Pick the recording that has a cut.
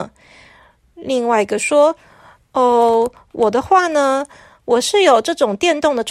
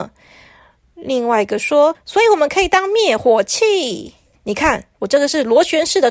second; 2 cuts; at 1.9 s, 4.3 s

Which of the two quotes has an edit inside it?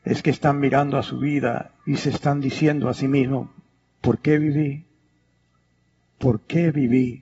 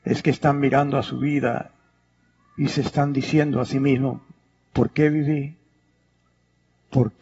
first; 1 cut; at 1.8 s

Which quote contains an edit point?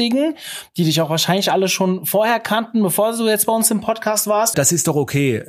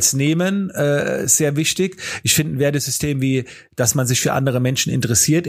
first; 1 cut; at 4.5 s

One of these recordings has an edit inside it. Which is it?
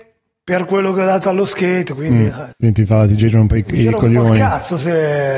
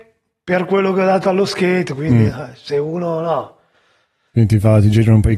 first; 1 cut; at 2.5 s

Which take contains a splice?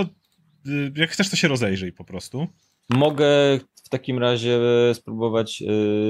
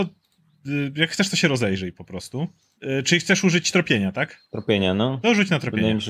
second; 1 cut; at 2.8 s

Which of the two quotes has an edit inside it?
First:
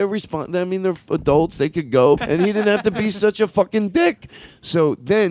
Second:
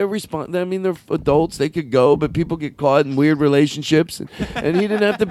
first; 1 cut; at 2.2 s

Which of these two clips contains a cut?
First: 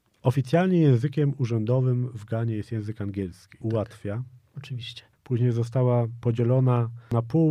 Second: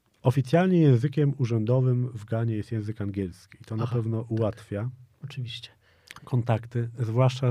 first; 2 cuts; at 3.6 s, 5.1 s

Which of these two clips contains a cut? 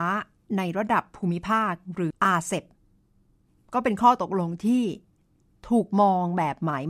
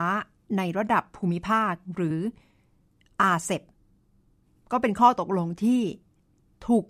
first; 1 cut; at 2.1 s

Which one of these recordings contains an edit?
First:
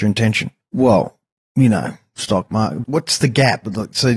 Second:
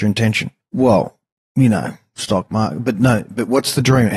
first; 1 cut; at 2.8 s

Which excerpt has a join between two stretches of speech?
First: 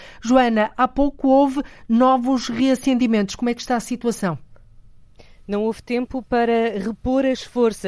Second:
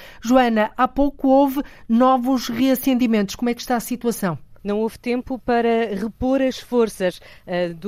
second; 1 cut; at 4.6 s

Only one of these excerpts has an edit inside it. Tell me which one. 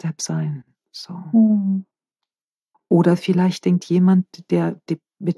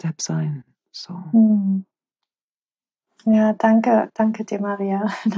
first; 1 cut; at 2.7 s

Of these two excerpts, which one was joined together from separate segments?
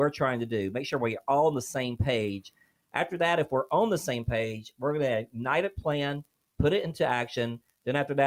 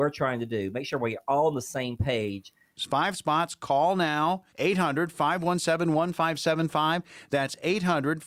second; 2 cuts; at 2.8 s, 4.5 s

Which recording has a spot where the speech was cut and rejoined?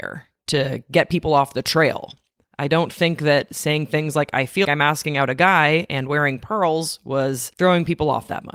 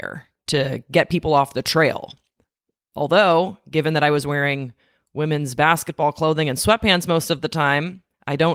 first; 2 cuts; at 2.5 s, 4.6 s

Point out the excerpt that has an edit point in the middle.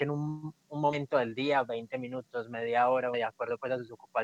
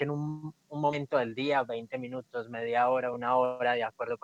first; 1 cut; at 3.1 s

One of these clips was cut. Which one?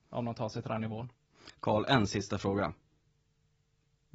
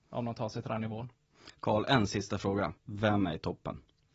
second; 1 cut; at 2.8 s

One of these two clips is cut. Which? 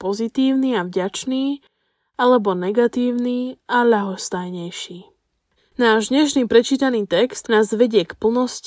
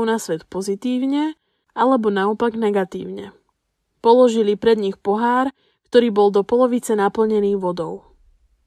first; 2 cuts; at 5.6 s, 7.4 s

